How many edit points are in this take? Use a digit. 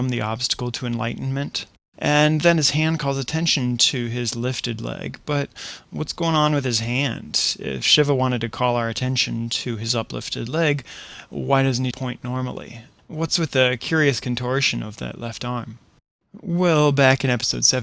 1